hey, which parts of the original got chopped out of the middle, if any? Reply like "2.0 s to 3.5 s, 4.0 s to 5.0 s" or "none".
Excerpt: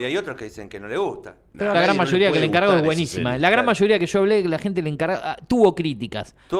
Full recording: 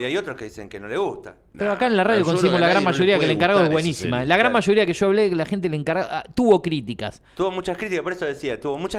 1.7 s to 2.6 s